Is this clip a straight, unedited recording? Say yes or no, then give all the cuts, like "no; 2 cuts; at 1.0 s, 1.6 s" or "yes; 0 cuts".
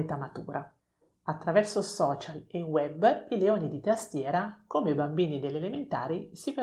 yes; 0 cuts